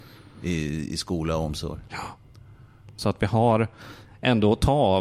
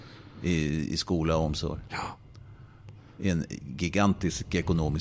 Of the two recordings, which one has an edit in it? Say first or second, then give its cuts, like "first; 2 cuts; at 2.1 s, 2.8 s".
first; 1 cut; at 3.0 s